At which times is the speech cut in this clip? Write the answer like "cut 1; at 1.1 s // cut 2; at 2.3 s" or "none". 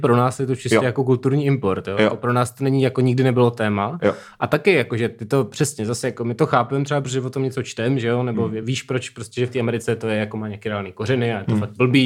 none